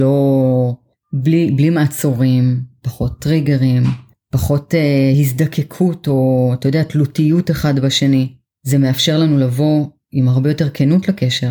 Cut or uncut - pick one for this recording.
uncut